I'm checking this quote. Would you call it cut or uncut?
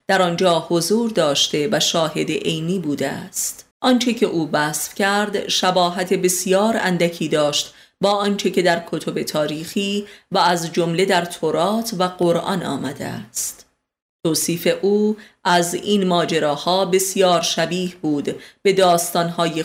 cut